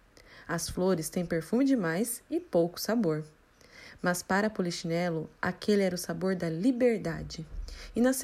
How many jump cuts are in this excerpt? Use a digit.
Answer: 0